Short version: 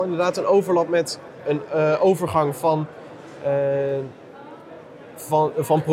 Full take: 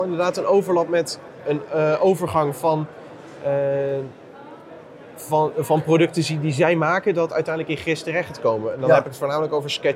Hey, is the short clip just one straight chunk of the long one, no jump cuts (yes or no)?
yes